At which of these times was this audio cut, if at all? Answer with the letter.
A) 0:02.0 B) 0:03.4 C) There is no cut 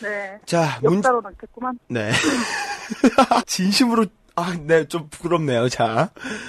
B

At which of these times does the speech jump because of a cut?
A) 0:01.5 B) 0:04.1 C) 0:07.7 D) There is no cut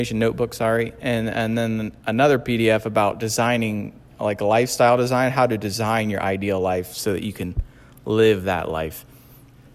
D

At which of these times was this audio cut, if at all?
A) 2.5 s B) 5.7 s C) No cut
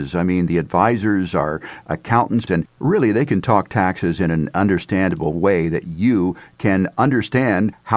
A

